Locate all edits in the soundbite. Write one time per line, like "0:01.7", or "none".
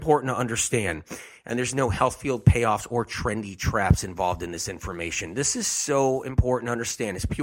none